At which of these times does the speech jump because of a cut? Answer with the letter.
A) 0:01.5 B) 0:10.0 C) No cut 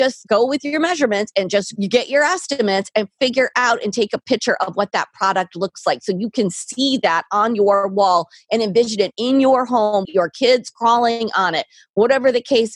B